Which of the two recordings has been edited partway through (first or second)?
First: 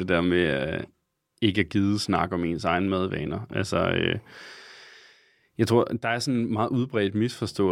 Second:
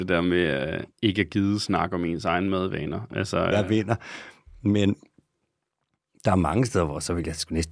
second